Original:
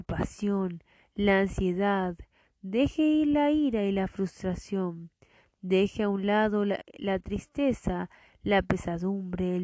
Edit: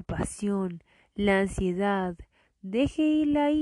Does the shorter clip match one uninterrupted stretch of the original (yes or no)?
yes